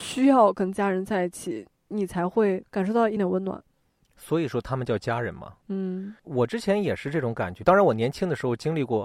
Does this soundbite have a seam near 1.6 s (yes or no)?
no